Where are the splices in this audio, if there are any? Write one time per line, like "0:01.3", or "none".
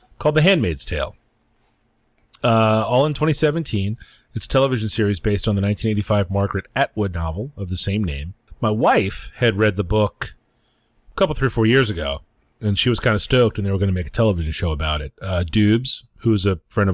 none